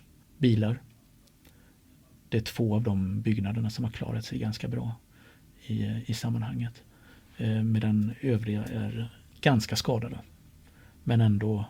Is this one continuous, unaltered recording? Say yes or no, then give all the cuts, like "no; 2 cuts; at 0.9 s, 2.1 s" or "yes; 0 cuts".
yes; 0 cuts